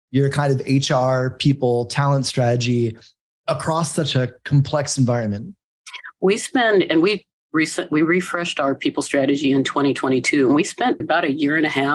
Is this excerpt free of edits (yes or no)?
no